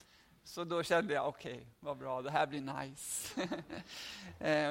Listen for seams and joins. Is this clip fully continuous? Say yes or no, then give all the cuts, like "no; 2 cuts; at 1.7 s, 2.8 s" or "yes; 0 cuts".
yes; 0 cuts